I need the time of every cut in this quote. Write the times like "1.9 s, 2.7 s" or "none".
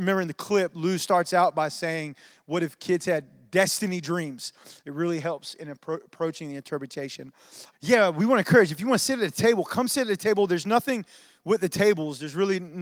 4.8 s, 7.7 s